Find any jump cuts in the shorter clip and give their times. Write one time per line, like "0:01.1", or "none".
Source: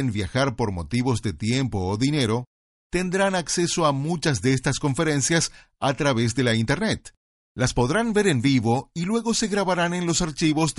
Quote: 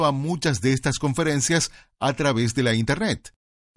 none